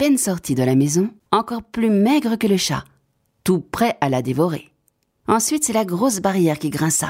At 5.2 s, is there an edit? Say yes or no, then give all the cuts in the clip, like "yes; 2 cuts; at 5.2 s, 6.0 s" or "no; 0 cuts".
yes; 2 cuts; at 1.3 s, 5.2 s